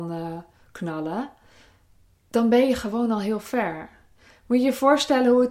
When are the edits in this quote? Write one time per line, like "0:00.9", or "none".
none